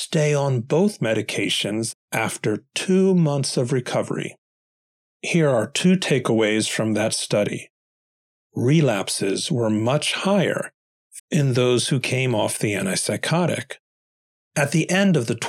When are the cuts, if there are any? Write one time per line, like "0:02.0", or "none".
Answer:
0:11.2
0:14.4